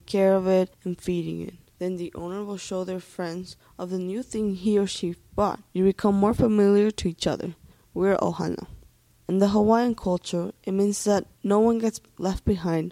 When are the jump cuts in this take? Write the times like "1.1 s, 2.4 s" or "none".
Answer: 5.7 s